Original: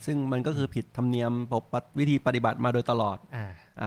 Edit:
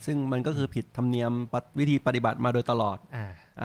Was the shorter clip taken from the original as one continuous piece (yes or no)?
no